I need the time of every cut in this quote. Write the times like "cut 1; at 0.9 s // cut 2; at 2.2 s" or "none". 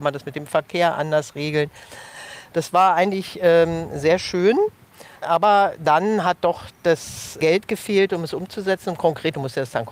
none